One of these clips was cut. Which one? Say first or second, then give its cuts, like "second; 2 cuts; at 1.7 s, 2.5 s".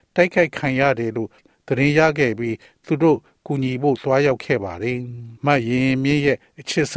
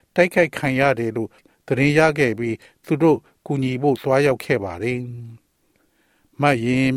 first; 1 cut; at 5.4 s